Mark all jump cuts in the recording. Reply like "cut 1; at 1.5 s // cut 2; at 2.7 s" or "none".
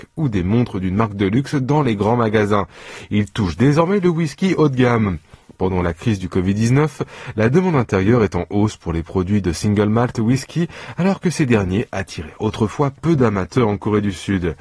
none